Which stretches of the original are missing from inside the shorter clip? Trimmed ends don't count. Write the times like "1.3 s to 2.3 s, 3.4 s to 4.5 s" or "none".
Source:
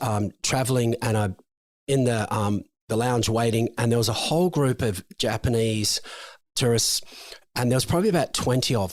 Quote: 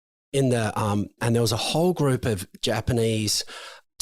2.7 s to 3.7 s